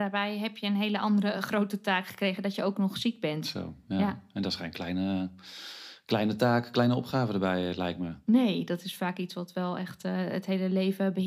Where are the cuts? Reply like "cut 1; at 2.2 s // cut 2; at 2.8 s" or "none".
none